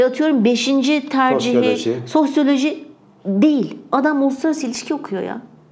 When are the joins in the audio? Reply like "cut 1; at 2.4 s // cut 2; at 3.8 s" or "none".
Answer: none